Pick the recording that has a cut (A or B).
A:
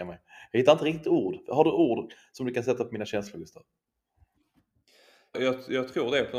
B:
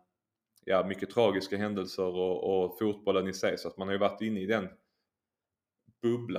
A